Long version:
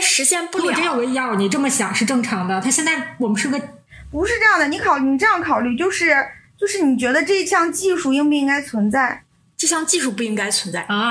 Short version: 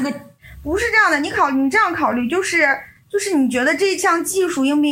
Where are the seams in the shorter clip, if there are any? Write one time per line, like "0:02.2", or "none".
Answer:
none